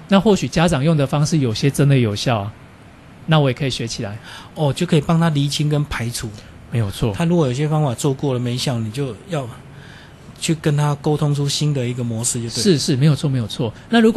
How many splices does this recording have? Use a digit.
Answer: 0